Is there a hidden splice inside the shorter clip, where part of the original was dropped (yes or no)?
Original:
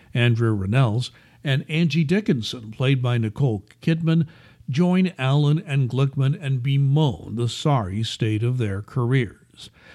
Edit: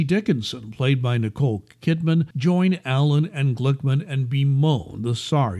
yes